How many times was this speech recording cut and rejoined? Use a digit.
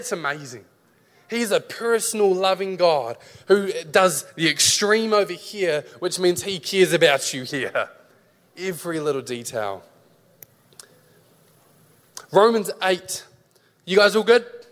0